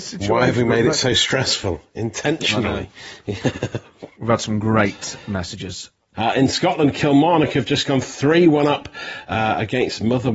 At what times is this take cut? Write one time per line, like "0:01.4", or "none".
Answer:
0:06.1